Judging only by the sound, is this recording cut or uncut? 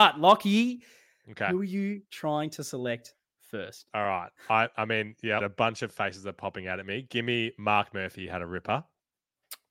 cut